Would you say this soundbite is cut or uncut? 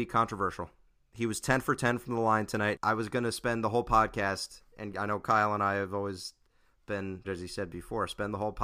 cut